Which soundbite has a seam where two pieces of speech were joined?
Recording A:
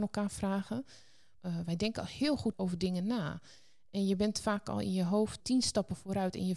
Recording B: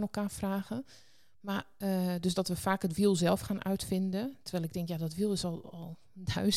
A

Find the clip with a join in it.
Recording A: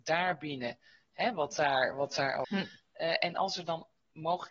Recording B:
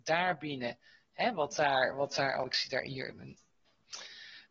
A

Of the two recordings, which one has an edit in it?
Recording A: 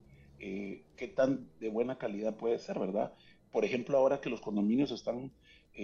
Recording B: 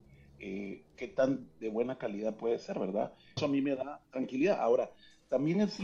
B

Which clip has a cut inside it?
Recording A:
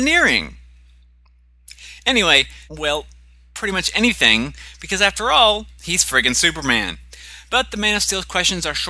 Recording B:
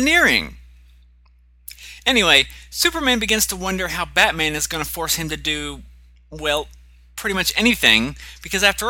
A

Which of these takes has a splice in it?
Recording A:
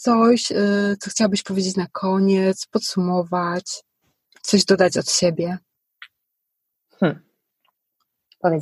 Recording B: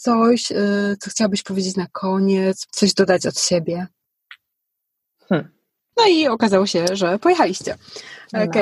B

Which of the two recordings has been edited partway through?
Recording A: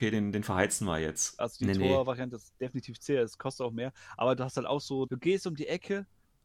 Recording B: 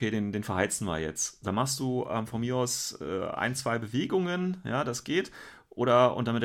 A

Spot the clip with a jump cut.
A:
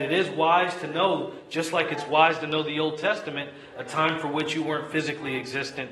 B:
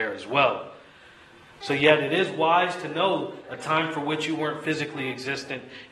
B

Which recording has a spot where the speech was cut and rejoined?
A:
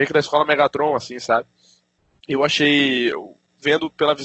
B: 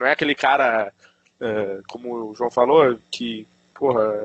B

